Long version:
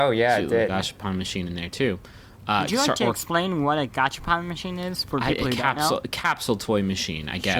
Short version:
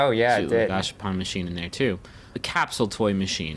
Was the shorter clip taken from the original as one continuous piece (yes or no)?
no